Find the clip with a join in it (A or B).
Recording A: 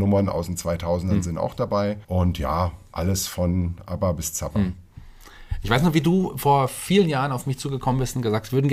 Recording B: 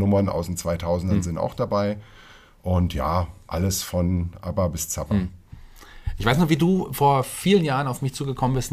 A